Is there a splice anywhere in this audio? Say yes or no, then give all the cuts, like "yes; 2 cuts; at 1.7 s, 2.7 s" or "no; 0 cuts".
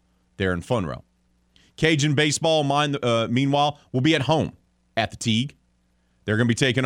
no; 0 cuts